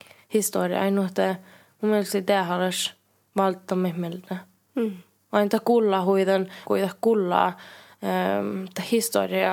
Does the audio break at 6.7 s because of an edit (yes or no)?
yes